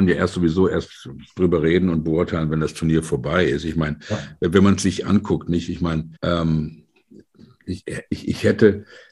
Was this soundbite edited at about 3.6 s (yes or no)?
no